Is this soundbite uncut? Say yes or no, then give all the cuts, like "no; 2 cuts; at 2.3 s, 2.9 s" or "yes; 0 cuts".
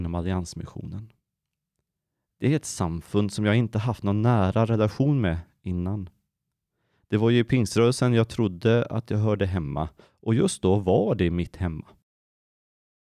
yes; 0 cuts